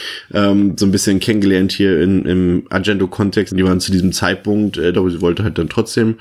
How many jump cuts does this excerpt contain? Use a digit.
2